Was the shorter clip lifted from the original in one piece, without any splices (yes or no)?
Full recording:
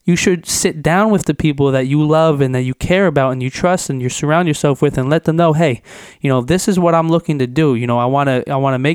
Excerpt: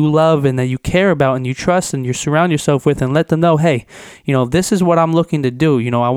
yes